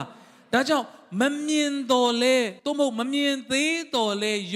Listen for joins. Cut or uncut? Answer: cut